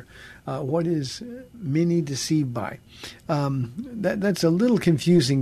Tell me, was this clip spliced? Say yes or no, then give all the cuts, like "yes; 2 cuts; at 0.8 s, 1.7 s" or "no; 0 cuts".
no; 0 cuts